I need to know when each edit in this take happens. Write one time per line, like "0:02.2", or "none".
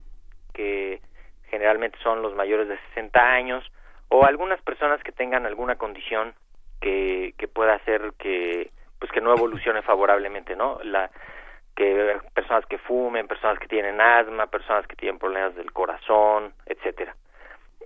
none